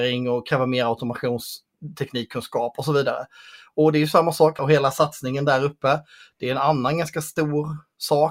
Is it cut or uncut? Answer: cut